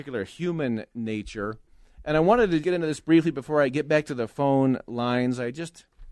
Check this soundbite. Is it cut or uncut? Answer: cut